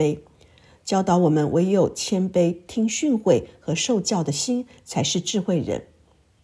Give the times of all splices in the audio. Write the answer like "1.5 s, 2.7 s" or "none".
none